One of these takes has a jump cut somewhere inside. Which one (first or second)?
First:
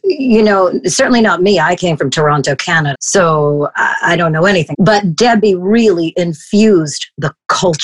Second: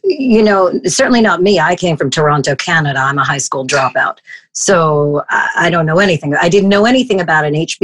first